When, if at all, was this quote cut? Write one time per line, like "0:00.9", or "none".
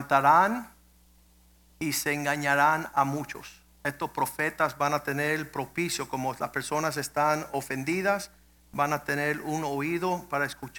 none